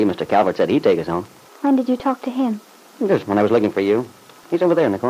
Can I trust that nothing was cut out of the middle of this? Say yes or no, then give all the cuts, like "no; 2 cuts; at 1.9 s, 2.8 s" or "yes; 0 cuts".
no; 2 cuts; at 1.5 s, 3.2 s